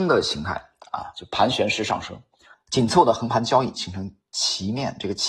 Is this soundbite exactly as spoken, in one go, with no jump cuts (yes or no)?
no